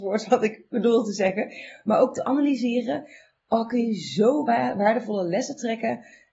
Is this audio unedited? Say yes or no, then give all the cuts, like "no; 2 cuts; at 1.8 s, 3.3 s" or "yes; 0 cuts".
yes; 0 cuts